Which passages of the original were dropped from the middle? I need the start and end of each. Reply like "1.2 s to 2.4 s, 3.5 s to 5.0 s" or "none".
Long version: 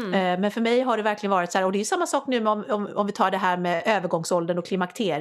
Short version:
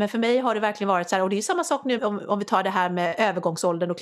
2.4 s to 2.6 s